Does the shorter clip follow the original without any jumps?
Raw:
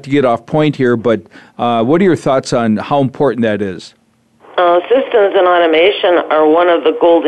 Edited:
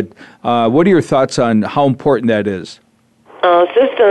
yes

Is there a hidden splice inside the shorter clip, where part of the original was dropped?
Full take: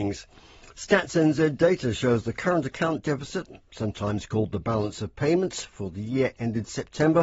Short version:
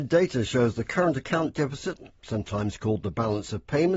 no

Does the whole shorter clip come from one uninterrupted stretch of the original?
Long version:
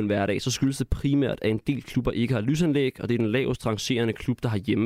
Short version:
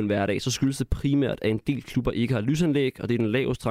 yes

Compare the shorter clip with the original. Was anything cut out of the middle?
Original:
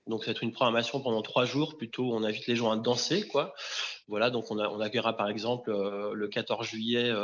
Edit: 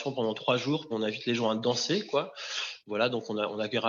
yes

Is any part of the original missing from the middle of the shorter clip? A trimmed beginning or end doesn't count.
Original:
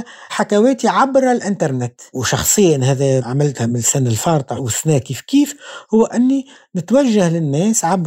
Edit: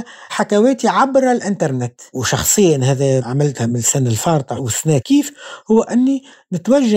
yes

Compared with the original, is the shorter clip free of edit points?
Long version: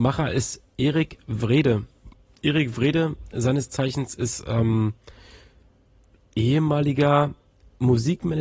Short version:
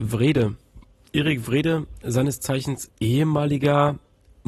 no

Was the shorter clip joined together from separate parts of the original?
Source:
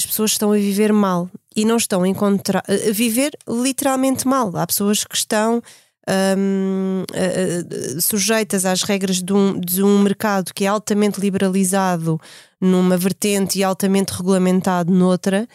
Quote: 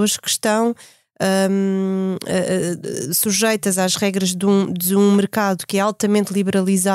no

